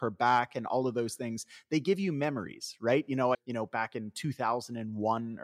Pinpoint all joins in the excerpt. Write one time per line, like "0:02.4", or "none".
0:03.3